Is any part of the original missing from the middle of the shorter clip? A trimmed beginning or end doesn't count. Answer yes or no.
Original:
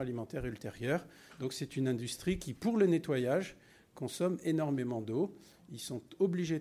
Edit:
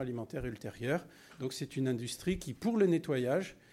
no